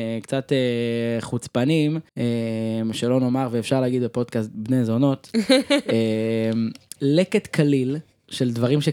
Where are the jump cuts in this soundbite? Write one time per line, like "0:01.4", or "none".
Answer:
0:02.1
0:07.0